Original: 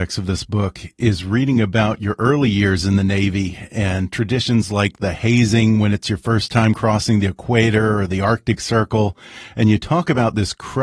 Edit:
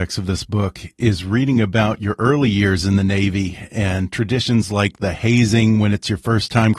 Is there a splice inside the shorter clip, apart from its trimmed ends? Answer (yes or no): no